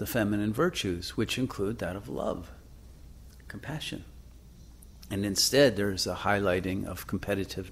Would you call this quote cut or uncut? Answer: uncut